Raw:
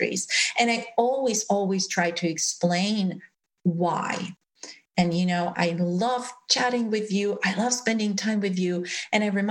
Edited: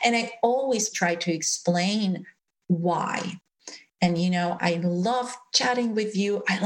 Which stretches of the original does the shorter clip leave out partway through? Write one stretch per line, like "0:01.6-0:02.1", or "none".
0:01.5-0:01.9